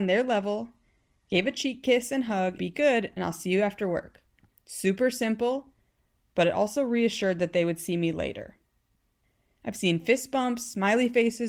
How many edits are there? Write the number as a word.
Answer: one